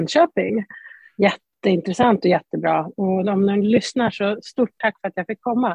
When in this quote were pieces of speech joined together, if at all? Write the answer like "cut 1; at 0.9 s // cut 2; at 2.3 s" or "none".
none

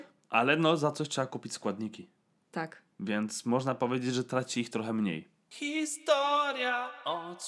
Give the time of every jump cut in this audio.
none

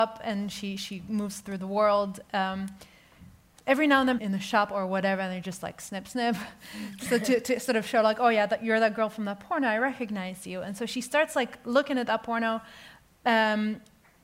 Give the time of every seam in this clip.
cut 1; at 4.2 s

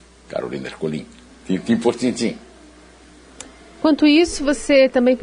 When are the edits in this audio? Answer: none

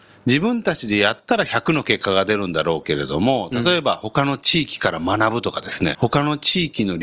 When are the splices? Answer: cut 1; at 5.9 s

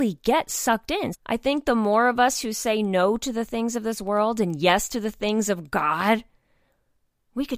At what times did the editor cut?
cut 1; at 1.1 s

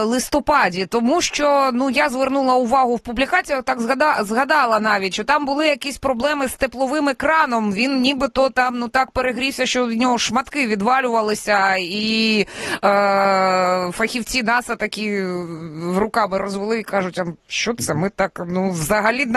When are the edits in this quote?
cut 1; at 17.4 s

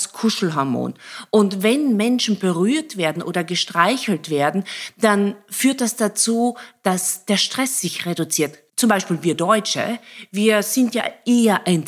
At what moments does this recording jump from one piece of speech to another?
cut 1; at 8.7 s

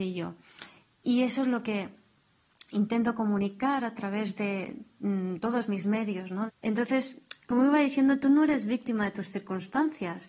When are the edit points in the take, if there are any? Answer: cut 1; at 6.5 s

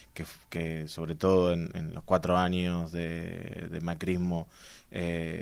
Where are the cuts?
none

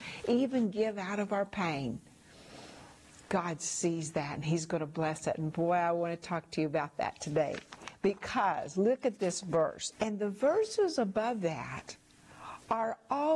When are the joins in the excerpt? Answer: cut 1; at 9.9 s

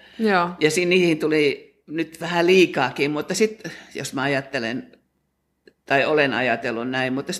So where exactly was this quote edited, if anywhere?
none

